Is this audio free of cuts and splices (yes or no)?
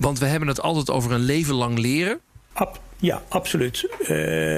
no